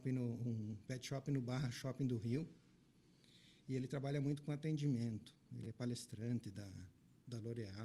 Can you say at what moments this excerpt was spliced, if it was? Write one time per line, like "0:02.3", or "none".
none

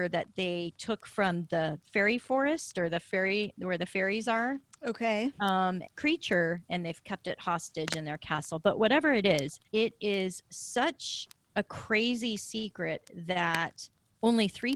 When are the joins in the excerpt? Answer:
0:05.9
0:09.7

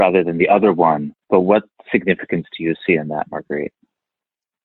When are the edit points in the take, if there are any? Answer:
0:01.2

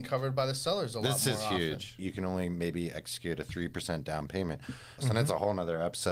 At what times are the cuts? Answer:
0:02.0
0:05.0

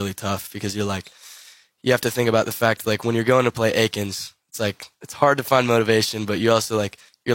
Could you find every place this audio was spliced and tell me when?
none

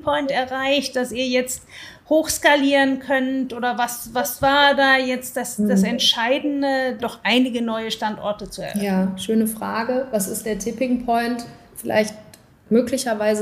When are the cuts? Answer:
0:07.0

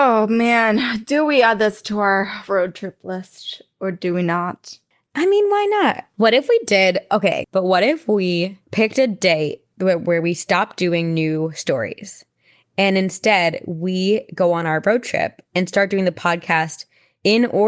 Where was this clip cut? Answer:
0:06.1
0:07.4

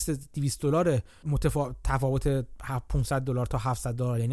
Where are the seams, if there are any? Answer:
none

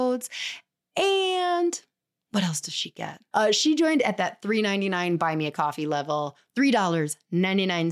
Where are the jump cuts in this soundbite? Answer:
0:03.3

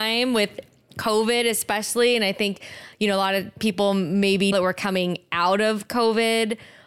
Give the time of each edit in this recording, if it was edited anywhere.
0:04.5

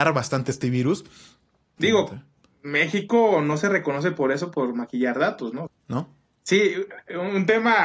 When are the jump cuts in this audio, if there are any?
0:01.8
0:05.7

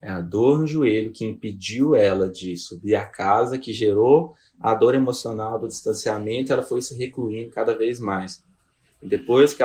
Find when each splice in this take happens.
none

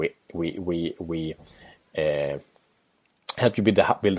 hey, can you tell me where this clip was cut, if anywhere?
none

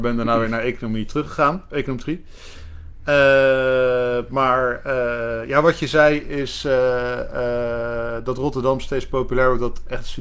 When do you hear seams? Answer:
none

